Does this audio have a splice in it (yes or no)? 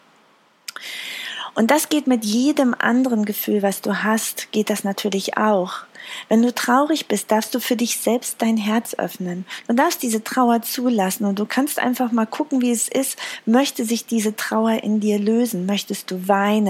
no